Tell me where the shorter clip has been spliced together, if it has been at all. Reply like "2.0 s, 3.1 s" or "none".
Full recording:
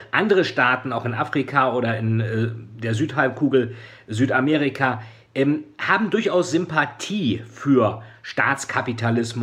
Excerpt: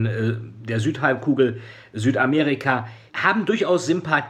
3.1 s